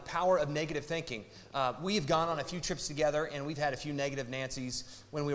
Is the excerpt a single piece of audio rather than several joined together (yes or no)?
yes